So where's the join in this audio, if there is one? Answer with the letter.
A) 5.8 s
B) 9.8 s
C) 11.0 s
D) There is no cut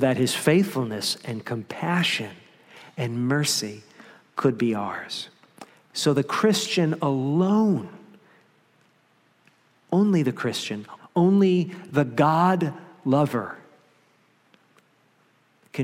C